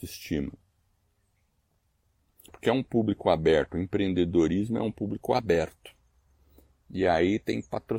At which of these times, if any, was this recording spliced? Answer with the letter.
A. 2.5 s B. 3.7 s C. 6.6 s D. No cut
A